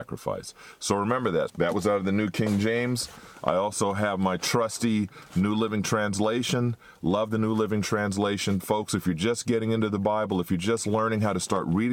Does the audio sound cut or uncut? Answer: cut